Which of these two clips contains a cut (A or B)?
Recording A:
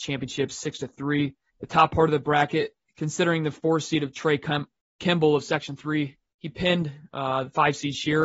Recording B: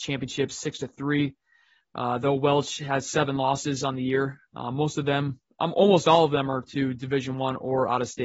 A